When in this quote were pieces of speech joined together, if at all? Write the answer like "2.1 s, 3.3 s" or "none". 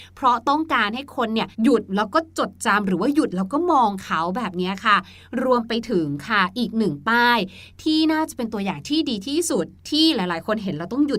1.5 s, 9.8 s